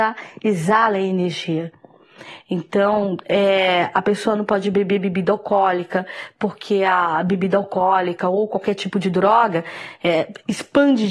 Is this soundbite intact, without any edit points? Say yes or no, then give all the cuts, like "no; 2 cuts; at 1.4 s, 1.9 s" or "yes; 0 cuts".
yes; 0 cuts